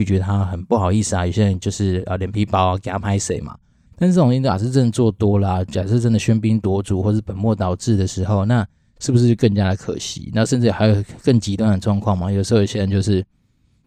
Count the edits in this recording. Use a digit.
1